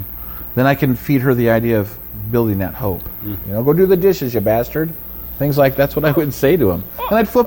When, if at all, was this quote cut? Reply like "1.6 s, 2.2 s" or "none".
3.4 s